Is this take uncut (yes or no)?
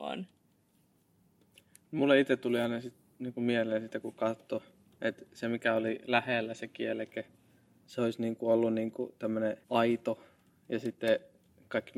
no